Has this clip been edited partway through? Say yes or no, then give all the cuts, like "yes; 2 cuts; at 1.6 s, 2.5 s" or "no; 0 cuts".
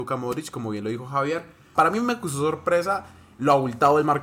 yes; 1 cut; at 1.8 s